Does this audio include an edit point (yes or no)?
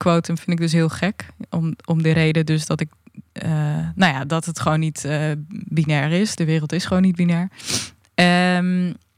no